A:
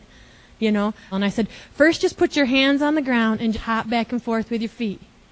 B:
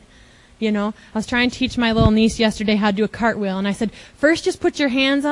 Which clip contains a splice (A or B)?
A